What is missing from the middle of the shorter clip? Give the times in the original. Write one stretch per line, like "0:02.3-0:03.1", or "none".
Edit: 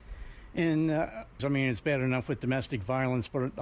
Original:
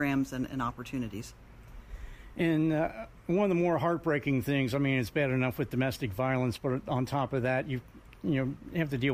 0:03.2-0:04.7